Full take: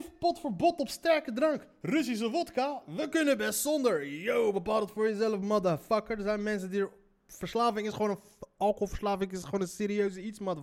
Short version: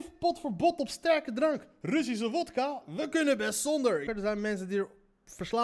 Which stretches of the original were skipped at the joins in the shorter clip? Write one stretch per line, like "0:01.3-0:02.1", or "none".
0:04.1-0:06.1